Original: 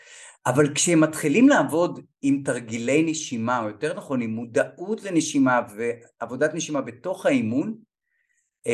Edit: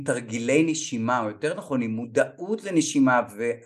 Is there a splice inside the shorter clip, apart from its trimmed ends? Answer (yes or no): no